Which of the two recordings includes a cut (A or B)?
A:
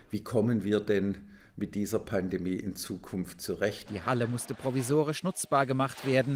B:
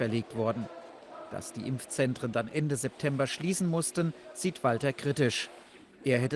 A